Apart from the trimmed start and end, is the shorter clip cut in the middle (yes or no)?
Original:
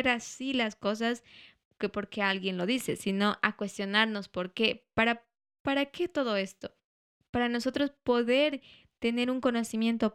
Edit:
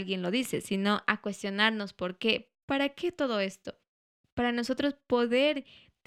yes